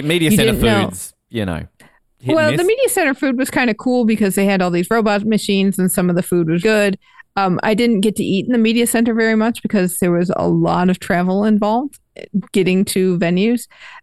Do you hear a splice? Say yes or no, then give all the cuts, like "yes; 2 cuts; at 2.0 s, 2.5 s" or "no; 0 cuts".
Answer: yes; 1 cut; at 6.6 s